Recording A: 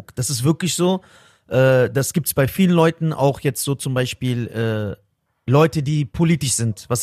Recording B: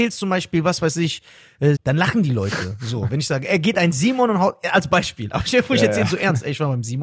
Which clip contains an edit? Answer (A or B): B